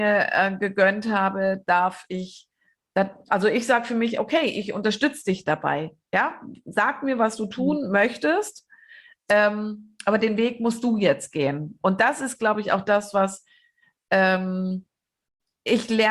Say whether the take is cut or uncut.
uncut